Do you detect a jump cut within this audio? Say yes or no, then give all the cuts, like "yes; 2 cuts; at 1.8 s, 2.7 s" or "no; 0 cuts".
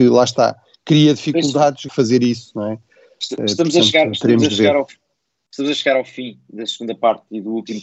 yes; 1 cut; at 1.9 s